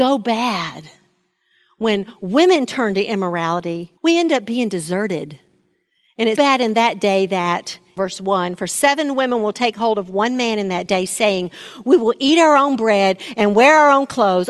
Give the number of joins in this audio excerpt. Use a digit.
3